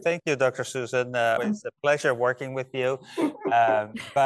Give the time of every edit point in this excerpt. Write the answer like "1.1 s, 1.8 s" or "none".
1.4 s